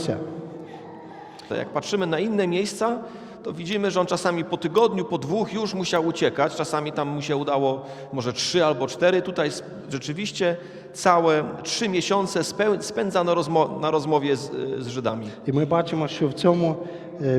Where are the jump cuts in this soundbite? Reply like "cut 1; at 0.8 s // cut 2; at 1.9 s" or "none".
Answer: cut 1; at 1.5 s